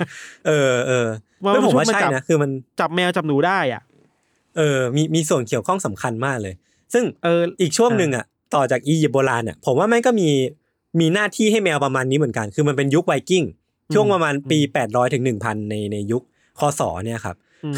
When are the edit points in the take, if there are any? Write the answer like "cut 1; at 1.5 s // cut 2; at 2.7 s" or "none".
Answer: none